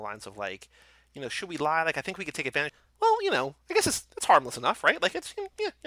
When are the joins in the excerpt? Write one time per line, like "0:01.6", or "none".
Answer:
0:02.7